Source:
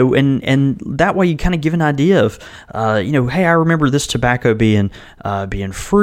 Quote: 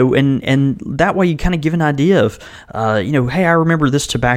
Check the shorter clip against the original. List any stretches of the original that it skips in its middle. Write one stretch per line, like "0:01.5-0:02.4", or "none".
none